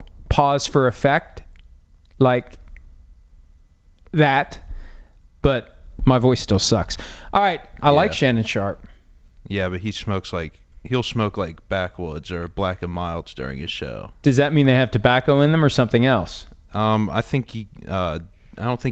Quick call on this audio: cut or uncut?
cut